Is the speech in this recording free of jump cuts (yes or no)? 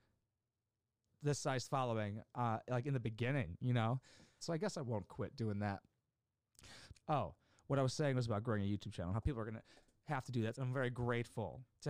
no